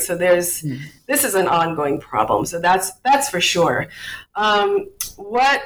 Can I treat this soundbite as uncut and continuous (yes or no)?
yes